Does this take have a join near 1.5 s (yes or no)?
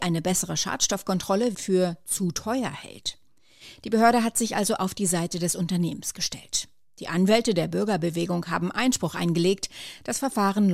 yes